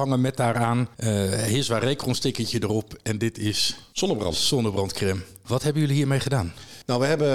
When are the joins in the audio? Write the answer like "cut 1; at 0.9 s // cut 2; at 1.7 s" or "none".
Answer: none